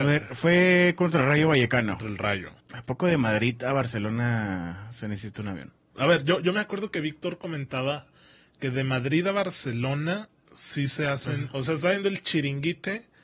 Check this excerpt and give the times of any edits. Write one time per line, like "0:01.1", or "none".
0:02.6
0:05.9
0:11.5